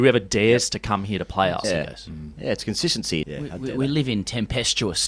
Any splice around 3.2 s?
yes; 2 cuts; at 1.6 s, 3.2 s

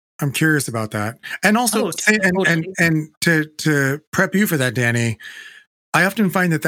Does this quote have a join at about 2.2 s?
no; 0 cuts

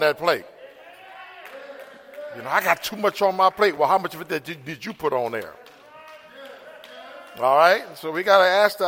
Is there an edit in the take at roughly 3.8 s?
no; 0 cuts

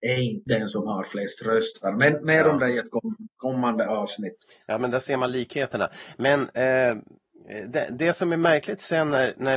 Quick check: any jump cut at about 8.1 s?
no; 0 cuts

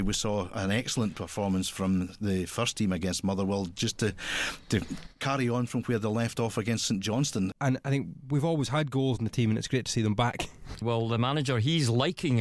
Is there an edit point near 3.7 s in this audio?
no; 2 cuts; at 7.5 s, 10.8 s

